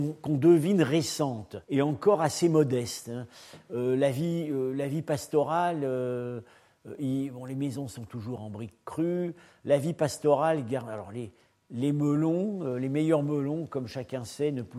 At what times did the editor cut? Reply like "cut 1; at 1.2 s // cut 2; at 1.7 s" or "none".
cut 1; at 1.6 s

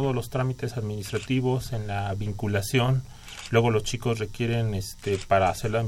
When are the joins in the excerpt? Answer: none

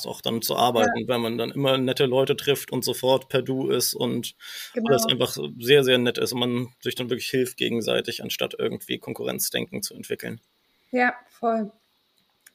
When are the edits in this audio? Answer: none

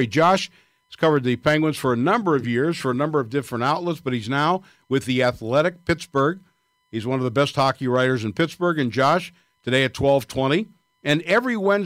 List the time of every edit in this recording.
none

